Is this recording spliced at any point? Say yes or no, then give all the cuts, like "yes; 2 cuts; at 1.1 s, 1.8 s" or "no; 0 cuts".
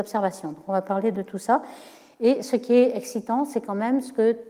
no; 0 cuts